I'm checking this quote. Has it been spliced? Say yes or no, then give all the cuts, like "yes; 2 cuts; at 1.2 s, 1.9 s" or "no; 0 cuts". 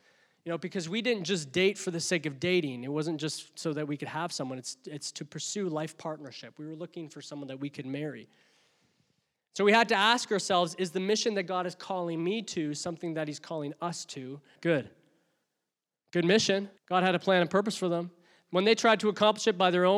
yes; 2 cuts; at 14.6 s, 16.8 s